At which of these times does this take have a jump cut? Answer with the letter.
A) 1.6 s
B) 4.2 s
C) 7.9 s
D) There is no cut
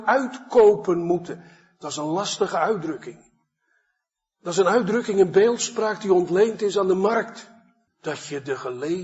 C